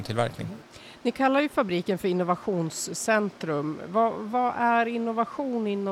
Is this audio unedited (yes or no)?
yes